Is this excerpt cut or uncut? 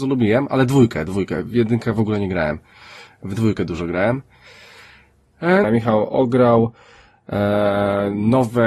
cut